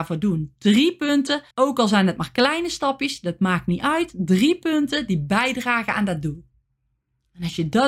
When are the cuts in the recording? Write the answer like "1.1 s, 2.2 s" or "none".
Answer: 1.5 s